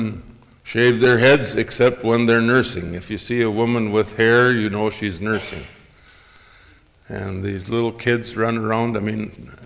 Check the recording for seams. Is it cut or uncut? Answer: uncut